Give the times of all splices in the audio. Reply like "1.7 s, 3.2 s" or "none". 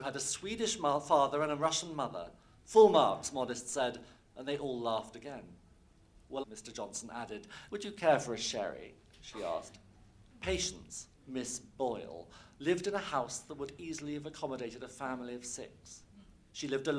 6.4 s, 7.7 s, 10.3 s